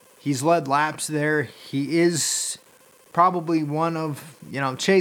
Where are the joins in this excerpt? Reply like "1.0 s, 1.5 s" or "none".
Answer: none